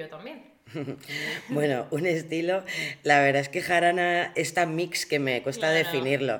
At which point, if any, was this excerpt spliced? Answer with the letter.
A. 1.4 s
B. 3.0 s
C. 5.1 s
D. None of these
D